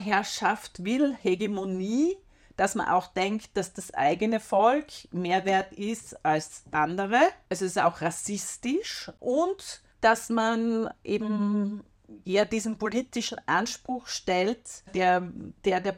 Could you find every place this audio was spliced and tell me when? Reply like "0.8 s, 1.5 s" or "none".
9.9 s, 14.9 s